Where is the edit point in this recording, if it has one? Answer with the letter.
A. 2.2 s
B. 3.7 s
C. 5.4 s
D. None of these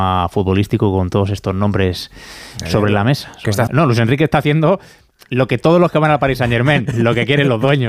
B